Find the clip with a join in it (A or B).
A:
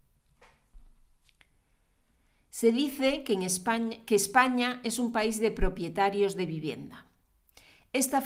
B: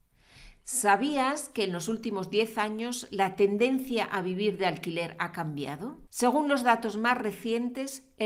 B